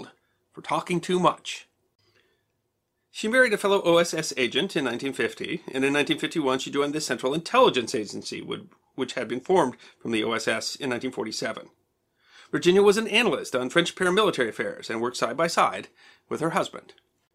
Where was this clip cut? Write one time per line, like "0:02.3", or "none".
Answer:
none